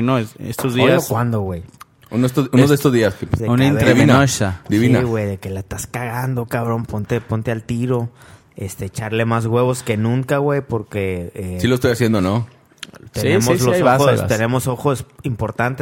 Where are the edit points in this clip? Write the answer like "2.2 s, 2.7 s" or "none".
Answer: 3.4 s